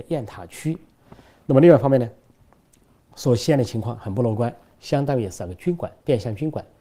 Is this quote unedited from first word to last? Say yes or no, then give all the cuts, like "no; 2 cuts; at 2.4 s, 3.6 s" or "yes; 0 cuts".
no; 1 cut; at 4.7 s